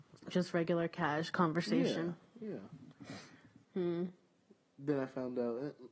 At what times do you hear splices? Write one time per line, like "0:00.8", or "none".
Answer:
none